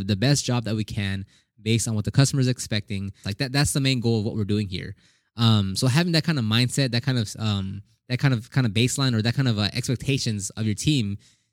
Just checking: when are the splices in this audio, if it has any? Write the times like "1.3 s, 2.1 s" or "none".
3.2 s